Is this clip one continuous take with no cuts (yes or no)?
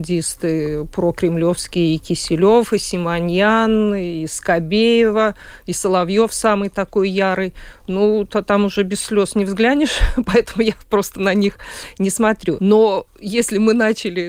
no